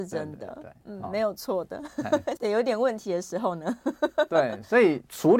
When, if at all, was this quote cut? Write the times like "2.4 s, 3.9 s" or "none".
2.4 s